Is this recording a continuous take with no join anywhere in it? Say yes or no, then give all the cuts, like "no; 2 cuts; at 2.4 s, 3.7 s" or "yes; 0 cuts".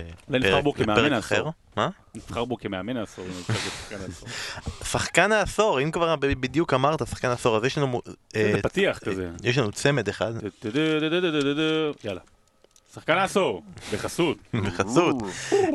no; 1 cut; at 14.5 s